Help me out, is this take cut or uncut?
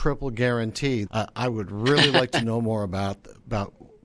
cut